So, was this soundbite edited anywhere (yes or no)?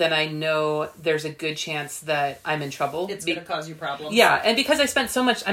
no